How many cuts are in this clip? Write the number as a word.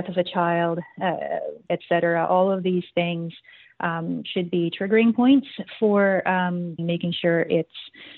two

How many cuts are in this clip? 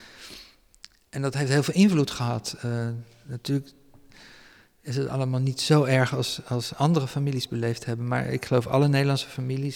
zero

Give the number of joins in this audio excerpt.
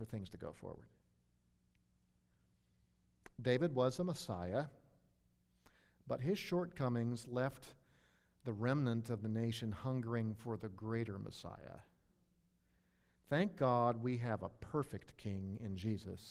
zero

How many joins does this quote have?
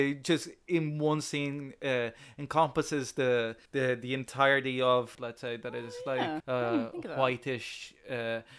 three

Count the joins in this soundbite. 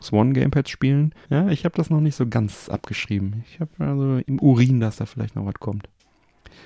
one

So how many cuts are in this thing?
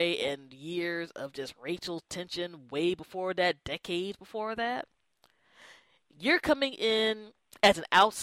zero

